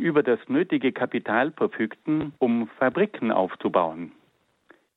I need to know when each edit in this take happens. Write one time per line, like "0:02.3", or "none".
0:02.4